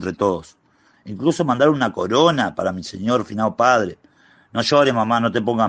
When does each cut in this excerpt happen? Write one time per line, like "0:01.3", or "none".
0:00.9